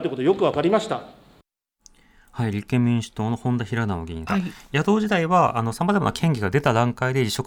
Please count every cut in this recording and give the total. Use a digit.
1